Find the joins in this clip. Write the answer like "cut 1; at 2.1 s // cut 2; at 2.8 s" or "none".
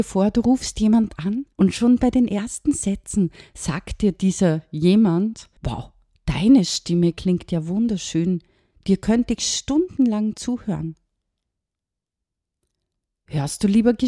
cut 1; at 1.5 s // cut 2; at 5.6 s